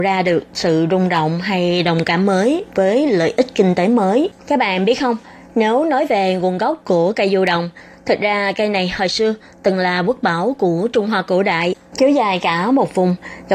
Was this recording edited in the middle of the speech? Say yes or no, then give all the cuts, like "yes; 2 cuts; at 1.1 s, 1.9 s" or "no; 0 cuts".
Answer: yes; 2 cuts; at 4.4 s, 11.9 s